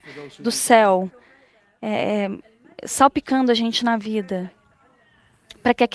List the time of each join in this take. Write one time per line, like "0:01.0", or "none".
none